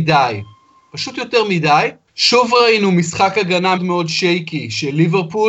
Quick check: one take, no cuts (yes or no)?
no